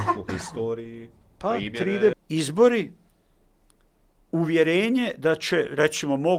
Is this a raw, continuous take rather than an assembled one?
no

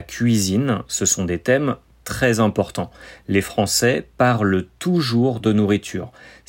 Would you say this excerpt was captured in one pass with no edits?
yes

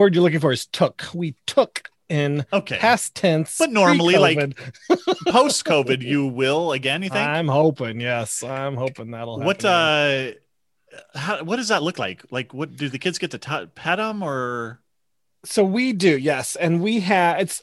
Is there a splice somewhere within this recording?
no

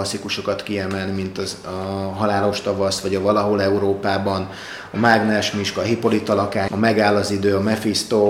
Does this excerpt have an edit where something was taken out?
yes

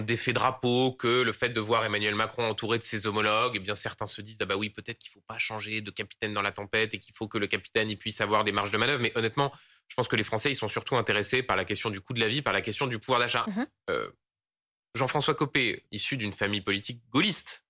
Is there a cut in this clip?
yes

